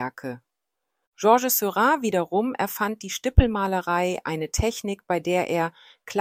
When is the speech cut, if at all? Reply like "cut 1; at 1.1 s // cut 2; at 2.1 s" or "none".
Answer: cut 1; at 1.0 s